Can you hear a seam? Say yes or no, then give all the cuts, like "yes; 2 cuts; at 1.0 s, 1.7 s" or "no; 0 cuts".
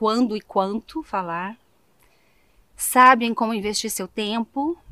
no; 0 cuts